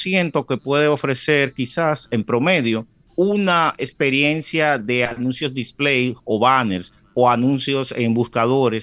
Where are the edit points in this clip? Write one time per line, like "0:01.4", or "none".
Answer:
none